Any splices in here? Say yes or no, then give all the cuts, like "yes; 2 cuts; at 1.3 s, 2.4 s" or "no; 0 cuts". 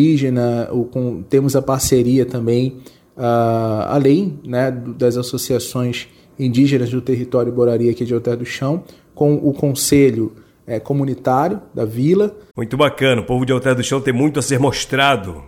yes; 1 cut; at 12.5 s